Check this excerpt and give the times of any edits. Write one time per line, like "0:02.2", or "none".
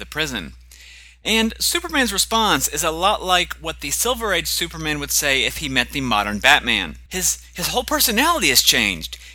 0:07.1